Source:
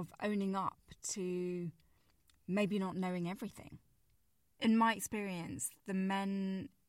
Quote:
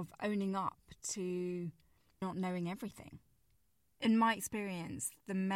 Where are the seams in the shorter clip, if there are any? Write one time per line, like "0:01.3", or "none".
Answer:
0:02.2